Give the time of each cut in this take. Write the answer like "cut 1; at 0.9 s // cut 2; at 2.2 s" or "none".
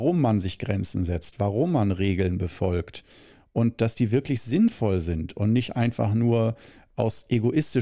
none